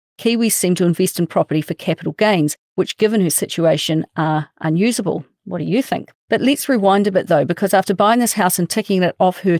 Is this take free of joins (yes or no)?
no